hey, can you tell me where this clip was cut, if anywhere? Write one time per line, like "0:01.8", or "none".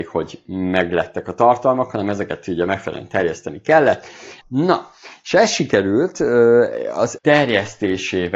0:04.4
0:07.2